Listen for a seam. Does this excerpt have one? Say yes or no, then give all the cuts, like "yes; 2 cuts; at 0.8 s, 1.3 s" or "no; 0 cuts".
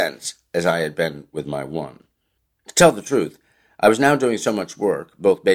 no; 0 cuts